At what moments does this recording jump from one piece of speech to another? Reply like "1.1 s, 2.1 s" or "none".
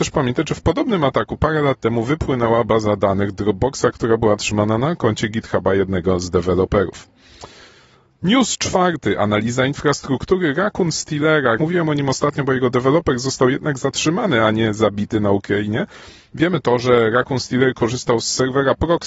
11.6 s, 16.3 s